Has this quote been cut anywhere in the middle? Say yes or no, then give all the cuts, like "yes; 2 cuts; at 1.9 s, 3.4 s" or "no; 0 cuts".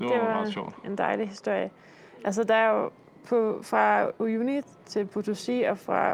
no; 0 cuts